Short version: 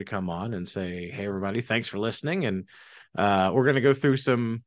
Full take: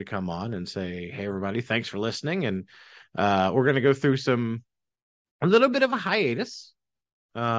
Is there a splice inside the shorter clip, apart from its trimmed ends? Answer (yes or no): no